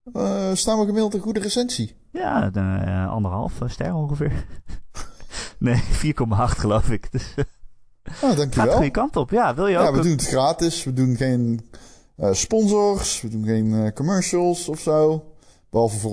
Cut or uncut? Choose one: uncut